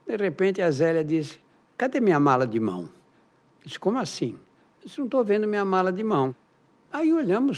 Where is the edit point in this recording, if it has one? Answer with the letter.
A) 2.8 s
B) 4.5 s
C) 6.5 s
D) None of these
D